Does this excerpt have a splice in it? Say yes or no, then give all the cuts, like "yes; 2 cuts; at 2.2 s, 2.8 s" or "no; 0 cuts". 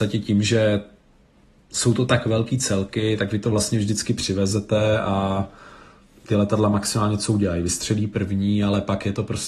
no; 0 cuts